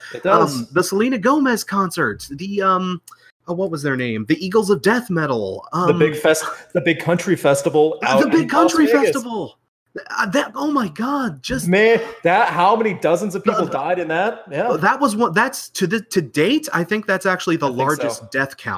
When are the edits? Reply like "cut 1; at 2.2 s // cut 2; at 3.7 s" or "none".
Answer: none